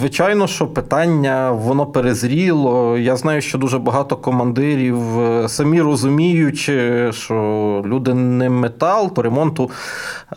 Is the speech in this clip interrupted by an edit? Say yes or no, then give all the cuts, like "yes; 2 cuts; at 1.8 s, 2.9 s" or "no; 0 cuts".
yes; 2 cuts; at 7.8 s, 9.1 s